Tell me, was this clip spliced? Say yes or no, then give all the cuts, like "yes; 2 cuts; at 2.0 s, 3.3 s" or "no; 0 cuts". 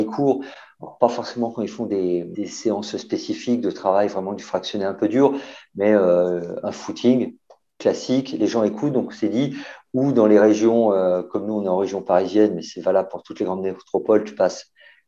no; 0 cuts